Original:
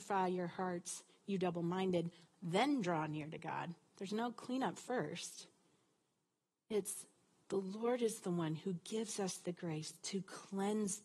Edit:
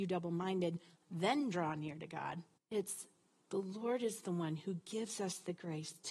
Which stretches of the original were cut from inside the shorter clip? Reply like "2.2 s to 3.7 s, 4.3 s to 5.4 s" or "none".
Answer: 3.9 s to 6.6 s